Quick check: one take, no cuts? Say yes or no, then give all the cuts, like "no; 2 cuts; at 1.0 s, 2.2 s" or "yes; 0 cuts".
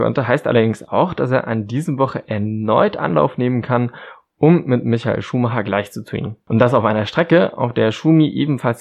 yes; 0 cuts